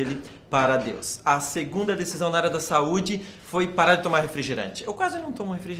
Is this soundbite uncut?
yes; 0 cuts

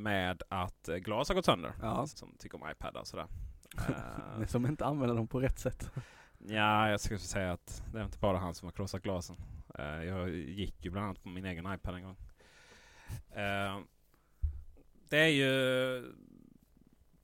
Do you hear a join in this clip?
yes; 1 cut; at 2.1 s

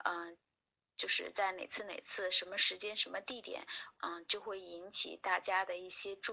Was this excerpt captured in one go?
no; 1 cut; at 3.9 s

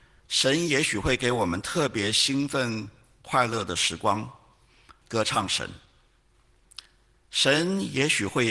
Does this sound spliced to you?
yes; 1 cut; at 5.0 s

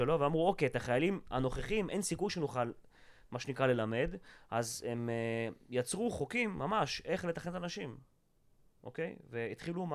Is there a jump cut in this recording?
no; 0 cuts

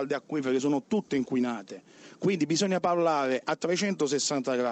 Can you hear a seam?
no; 0 cuts

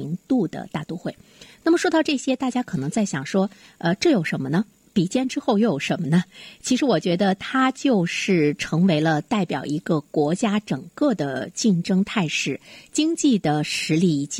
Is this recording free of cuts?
yes; 0 cuts

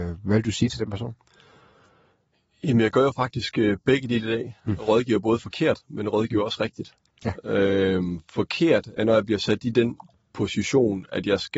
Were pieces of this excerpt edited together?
yes; 1 cut; at 9.0 s

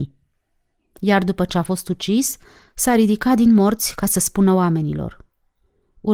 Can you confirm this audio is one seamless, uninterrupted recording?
no; 1 cut; at 2.6 s

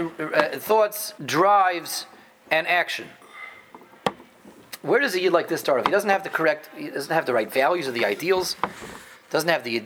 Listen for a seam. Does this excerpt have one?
yes; 1 cut; at 1.2 s

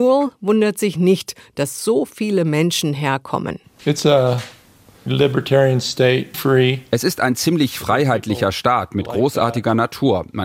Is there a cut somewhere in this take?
yes; 2 cuts; at 5.1 s, 6.3 s

